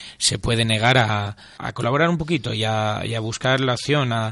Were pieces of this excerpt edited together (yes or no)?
yes